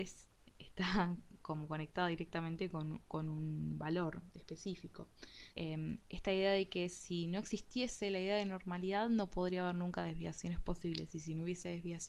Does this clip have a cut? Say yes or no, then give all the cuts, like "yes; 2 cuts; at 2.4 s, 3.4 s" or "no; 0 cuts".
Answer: yes; 1 cut; at 5.5 s